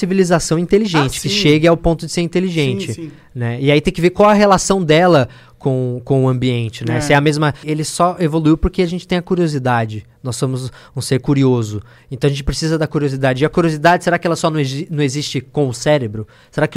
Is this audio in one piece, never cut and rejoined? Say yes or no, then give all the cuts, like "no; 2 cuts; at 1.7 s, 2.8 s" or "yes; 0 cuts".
no; 1 cut; at 7.6 s